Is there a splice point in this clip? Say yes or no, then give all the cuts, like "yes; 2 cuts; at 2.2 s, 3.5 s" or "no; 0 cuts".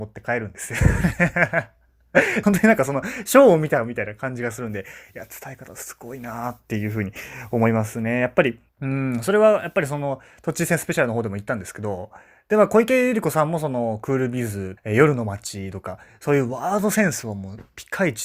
yes; 3 cuts; at 2.4 s, 8.7 s, 14.8 s